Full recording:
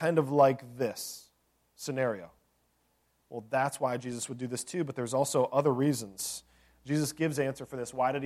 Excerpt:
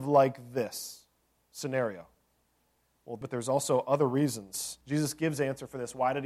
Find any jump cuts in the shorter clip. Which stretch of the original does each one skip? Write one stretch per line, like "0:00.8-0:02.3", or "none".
0:03.5-0:04.9
0:06.5-0:06.8

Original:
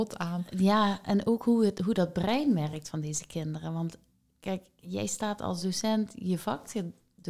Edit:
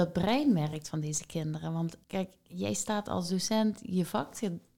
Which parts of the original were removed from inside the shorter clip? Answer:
0:04.0-0:04.4

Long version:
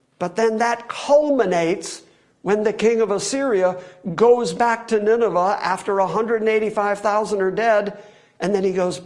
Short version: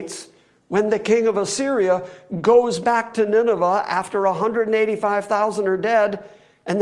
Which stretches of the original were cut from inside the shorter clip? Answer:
none

